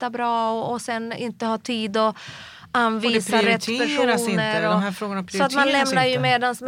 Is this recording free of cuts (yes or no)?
yes